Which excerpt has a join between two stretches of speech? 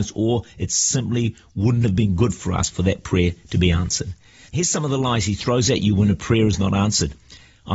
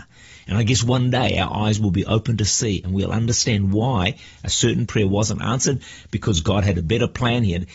first; 1 cut; at 4.5 s

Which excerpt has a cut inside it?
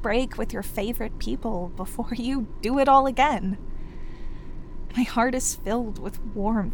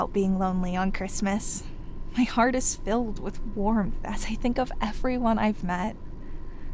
first; 1 cut; at 4.9 s

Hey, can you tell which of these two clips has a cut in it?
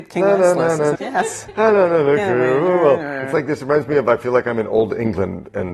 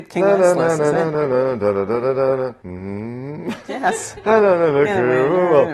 first; 1 cut; at 0.9 s

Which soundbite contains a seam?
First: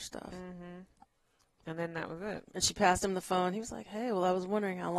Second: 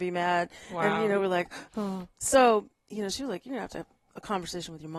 first; 1 cut; at 2.5 s

